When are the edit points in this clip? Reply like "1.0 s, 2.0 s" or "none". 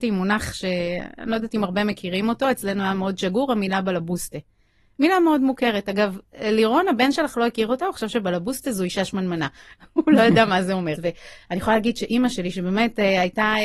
11.0 s